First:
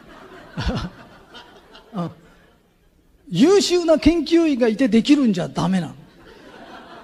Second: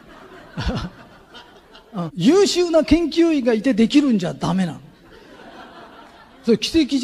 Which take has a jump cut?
second; 1 cut; at 2.1 s

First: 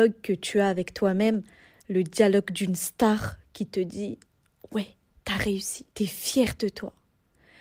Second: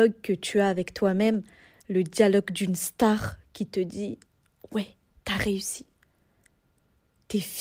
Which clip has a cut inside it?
first; 1 cut; at 5.9 s

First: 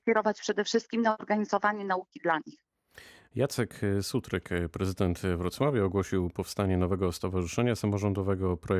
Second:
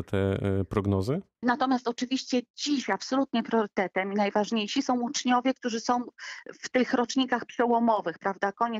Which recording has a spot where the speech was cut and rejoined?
second; 1 cut; at 1.4 s

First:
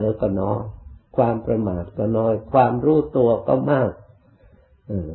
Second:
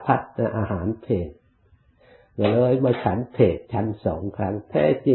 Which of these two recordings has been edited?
second; 1 cut; at 3.6 s

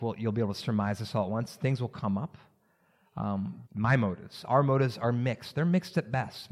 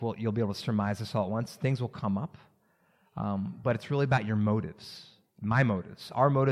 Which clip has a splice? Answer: first; 1 cut; at 3.6 s

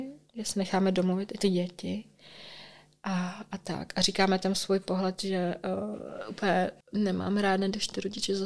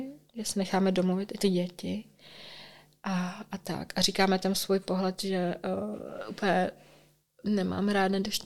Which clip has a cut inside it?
first; 1 cut; at 6.8 s

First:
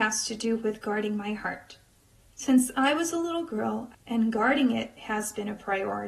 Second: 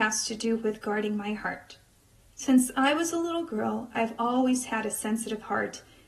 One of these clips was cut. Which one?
first; 1 cut; at 3.9 s

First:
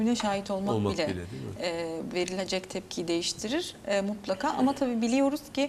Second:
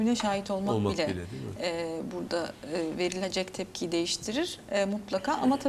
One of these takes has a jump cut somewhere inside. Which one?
first; 1 cut; at 2.1 s

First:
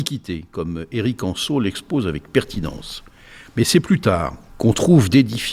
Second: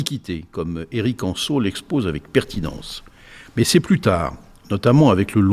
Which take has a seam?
first; 1 cut; at 4.5 s

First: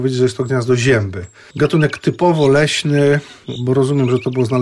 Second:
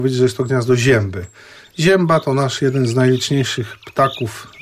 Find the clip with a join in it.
first; 1 cut; at 1.5 s

